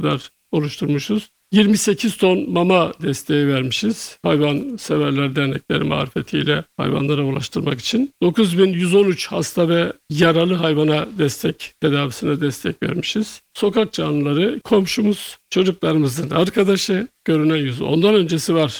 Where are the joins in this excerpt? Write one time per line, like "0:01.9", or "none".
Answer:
0:13.5
0:14.6
0:17.2